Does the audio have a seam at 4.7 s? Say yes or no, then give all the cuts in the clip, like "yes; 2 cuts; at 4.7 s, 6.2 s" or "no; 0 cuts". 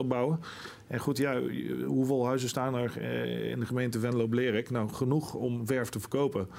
no; 0 cuts